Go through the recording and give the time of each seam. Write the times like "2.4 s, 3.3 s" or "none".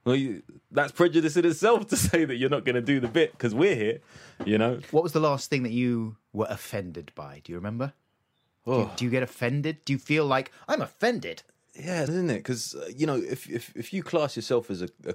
12.1 s